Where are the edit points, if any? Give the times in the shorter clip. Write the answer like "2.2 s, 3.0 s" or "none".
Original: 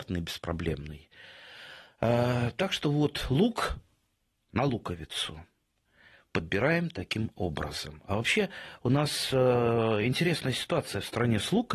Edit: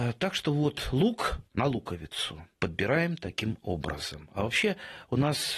1.5 s, 2.5 s